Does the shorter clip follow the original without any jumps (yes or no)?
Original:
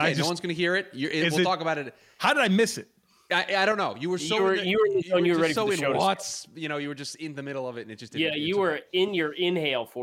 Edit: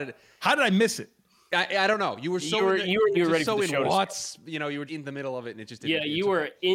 no